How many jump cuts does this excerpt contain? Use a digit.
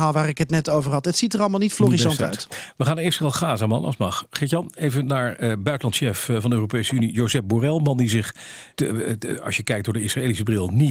1